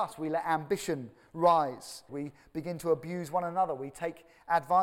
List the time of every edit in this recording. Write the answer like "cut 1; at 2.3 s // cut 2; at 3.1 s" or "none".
cut 1; at 2.1 s